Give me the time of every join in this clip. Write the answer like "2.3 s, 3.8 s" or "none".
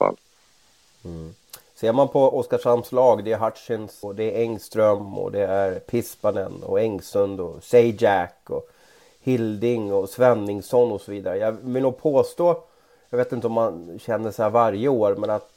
4.0 s

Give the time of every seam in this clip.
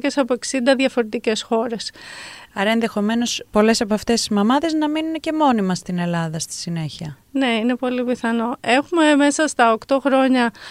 2.5 s

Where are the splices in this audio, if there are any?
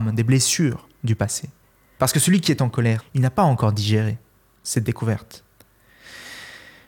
2.0 s, 3.0 s

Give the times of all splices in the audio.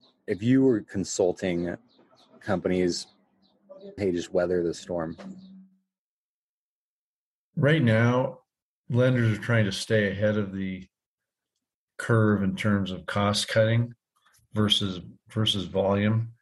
4.0 s

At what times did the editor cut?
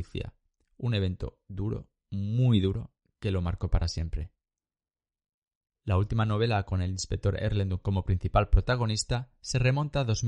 none

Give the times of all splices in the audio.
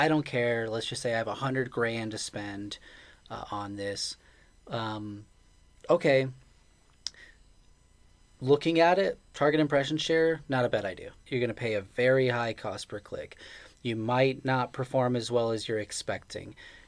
11.3 s

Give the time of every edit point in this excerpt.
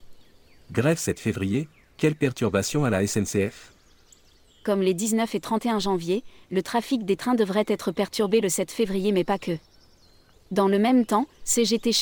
10.3 s

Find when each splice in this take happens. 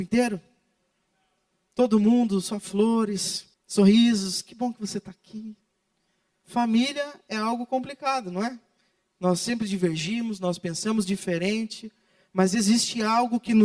3.5 s, 6.4 s

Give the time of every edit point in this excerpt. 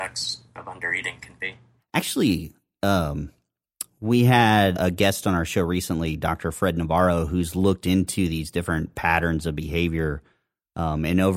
1.8 s, 4.7 s

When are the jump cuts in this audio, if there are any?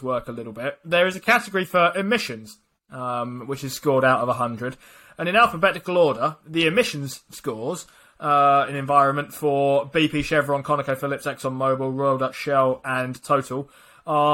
none

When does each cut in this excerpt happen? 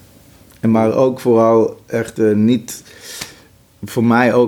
none

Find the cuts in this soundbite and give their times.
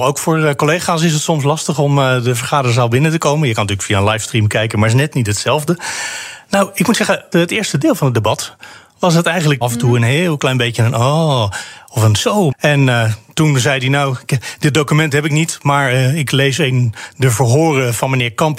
7.3 s, 9.6 s, 12.5 s

